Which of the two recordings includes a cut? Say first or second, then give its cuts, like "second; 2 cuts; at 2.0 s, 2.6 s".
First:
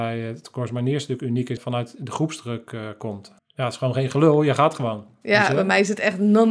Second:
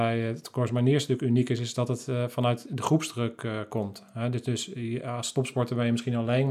first; 2 cuts; at 1.6 s, 3.4 s